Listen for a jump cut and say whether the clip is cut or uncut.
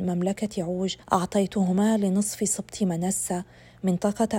cut